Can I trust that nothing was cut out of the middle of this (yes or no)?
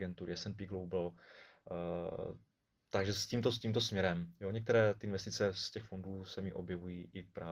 yes